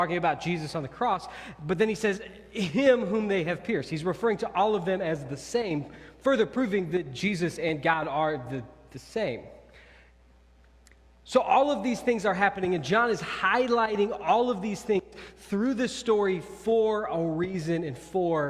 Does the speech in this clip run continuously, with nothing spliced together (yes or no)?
yes